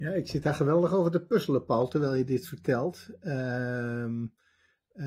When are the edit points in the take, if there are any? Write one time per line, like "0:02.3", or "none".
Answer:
none